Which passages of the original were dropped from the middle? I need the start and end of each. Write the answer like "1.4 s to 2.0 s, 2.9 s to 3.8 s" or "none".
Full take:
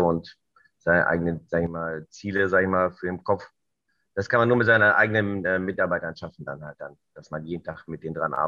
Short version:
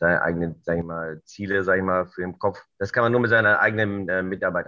3.6 s to 4.1 s